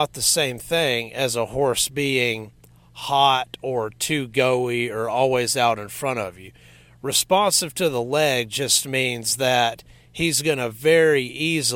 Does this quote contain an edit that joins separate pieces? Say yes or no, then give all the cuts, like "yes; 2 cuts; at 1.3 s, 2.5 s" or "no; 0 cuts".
no; 0 cuts